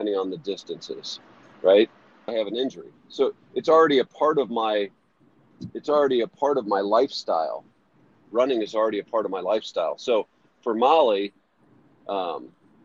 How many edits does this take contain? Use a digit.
2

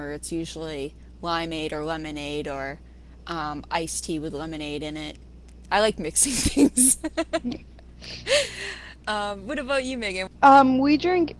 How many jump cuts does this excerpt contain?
1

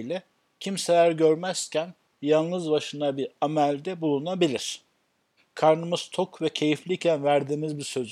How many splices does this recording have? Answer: 1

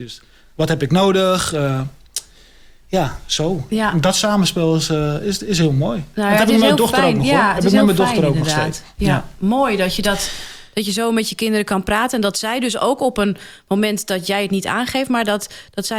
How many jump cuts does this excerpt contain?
0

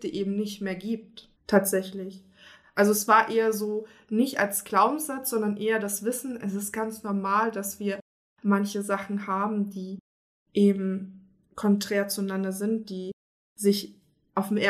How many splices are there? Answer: 1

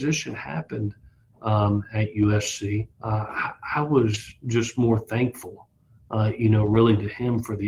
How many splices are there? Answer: 1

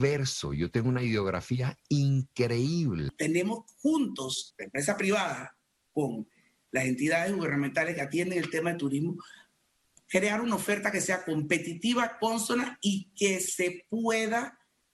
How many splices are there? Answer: 1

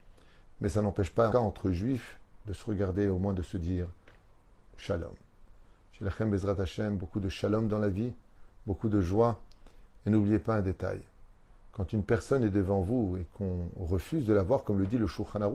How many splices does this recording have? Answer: 1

